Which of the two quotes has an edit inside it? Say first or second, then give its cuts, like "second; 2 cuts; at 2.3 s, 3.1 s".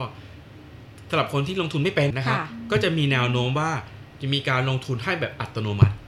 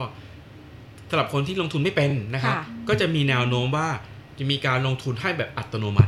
first; 1 cut; at 2.1 s